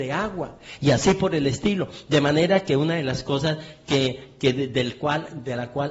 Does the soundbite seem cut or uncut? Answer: uncut